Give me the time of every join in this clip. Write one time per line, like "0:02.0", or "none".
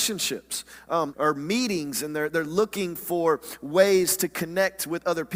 0:01.1